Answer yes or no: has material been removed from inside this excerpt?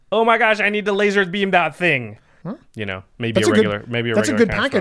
yes